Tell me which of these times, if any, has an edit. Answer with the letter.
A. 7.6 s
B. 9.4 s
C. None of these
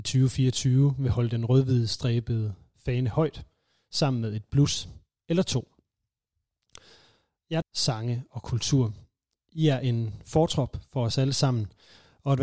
A